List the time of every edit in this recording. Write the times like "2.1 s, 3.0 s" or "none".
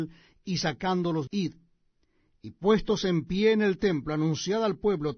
1.3 s

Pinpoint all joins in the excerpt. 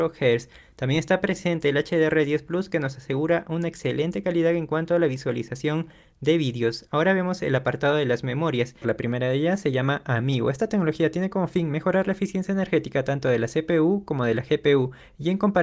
8.8 s

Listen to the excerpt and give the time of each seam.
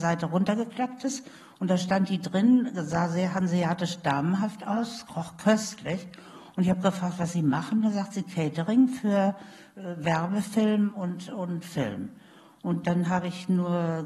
none

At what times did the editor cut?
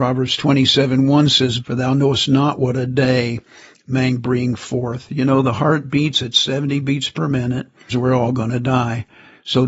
1.6 s, 7.9 s

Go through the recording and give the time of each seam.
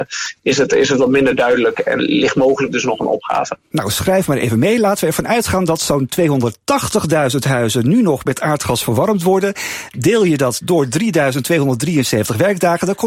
2.0 s

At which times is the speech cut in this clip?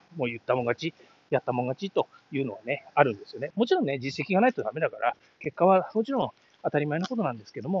3.5 s, 5.4 s

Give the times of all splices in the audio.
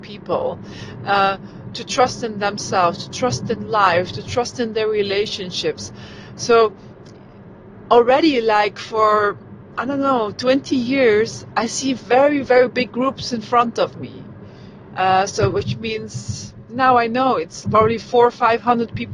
14.9 s, 17.6 s

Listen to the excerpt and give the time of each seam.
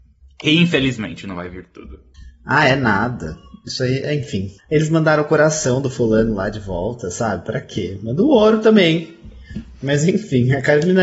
4.6 s

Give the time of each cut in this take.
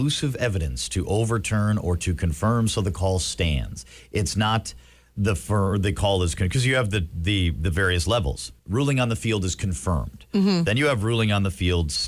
8.6 s

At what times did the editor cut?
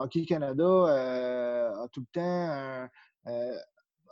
none

